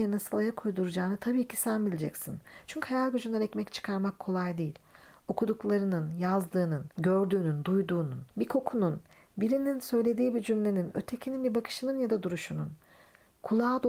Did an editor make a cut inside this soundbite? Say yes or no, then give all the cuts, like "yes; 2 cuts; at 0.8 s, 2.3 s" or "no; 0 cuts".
yes; 2 cuts; at 6.9 s, 8.3 s